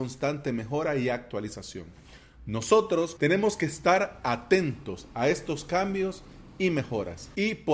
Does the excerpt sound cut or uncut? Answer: cut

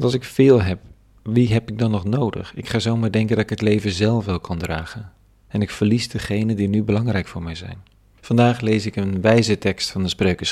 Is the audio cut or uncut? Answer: cut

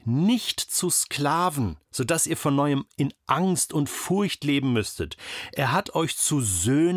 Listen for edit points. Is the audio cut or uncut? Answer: cut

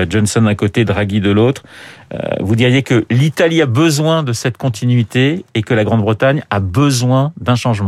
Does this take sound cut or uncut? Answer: uncut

